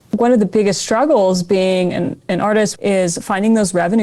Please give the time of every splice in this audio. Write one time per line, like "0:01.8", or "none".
0:02.8